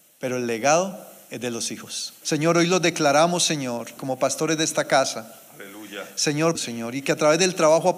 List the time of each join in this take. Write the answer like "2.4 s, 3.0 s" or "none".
2.2 s, 4.0 s, 6.5 s